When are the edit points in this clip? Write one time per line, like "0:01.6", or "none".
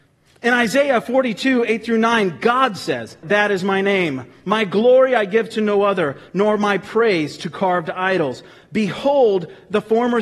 0:03.2